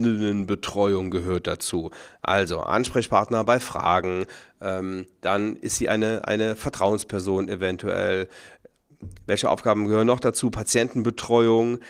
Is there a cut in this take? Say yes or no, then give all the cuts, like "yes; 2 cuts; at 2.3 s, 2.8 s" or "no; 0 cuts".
no; 0 cuts